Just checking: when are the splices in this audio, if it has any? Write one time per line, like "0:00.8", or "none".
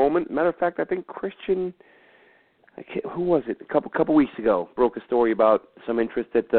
none